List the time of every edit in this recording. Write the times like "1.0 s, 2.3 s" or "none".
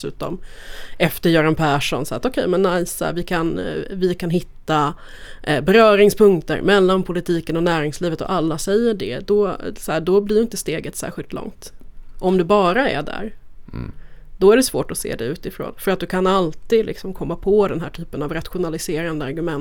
none